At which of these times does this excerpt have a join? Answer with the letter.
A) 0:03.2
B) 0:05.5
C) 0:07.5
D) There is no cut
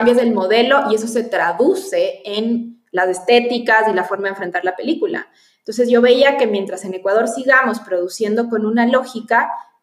D